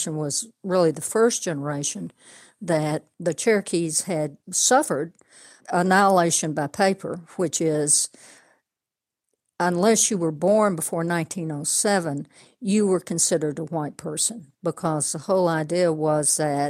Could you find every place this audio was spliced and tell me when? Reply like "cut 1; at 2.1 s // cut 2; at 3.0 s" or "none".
cut 1; at 12.5 s // cut 2; at 14.5 s